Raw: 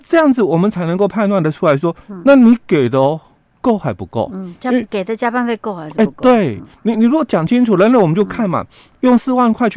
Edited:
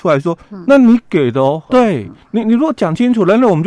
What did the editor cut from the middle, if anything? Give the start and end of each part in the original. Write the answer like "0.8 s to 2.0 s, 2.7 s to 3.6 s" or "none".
3.3 s to 6.2 s